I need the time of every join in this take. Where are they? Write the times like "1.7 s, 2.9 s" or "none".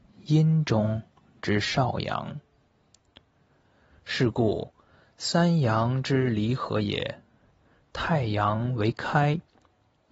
none

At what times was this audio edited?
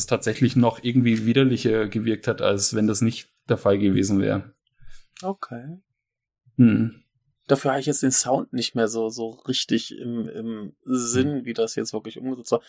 none

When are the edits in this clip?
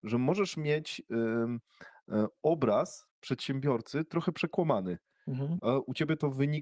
5.6 s

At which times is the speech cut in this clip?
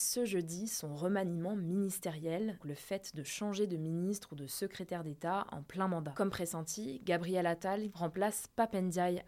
2.6 s, 7.9 s

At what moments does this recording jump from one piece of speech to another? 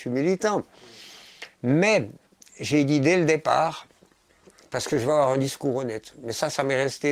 none

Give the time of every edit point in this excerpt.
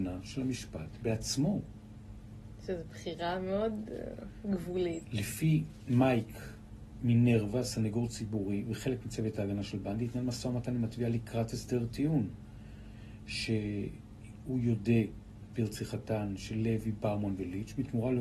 5.0 s

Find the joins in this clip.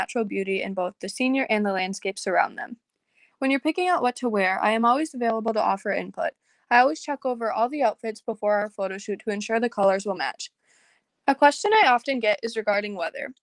3.3 s, 11.1 s

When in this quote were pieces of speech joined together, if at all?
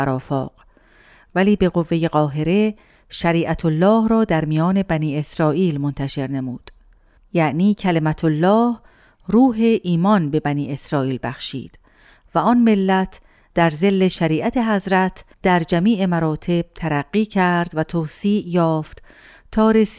7.2 s, 15.3 s

